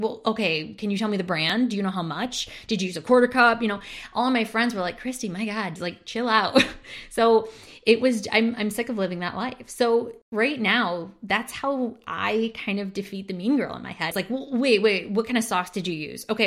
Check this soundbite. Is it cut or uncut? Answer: cut